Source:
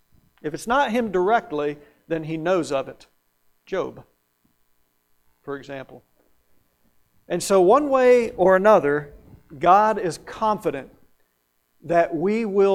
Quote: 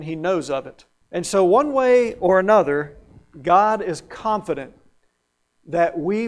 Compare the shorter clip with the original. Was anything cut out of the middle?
yes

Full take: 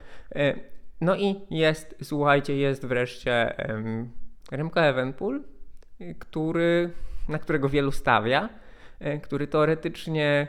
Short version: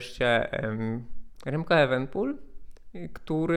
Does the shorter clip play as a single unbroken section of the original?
yes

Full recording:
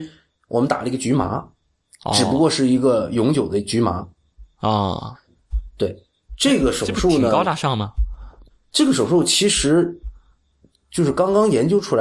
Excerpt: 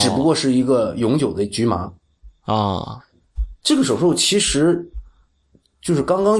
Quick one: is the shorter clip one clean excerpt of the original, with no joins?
no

